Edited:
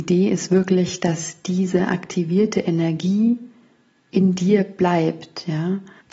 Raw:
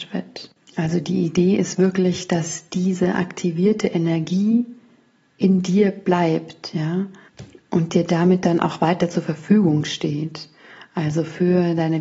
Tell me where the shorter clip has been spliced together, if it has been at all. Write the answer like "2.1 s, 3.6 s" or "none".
none